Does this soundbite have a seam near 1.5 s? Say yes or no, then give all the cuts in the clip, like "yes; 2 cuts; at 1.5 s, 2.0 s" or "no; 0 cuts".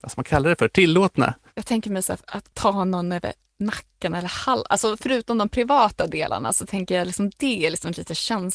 no; 0 cuts